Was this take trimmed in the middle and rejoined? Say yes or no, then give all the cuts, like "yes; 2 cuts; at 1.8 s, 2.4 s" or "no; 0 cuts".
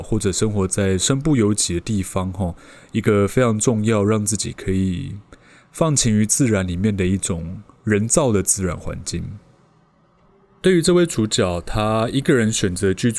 yes; 1 cut; at 10.6 s